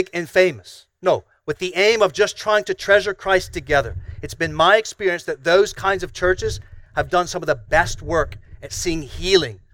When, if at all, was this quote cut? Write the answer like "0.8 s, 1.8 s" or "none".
6.9 s